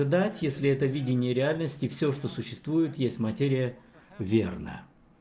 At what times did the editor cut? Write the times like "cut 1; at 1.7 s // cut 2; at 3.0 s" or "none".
none